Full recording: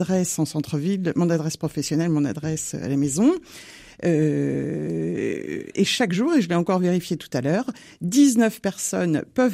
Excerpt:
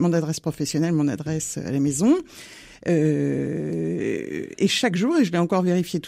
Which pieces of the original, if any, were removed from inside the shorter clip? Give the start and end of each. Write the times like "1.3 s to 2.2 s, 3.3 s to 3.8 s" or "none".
none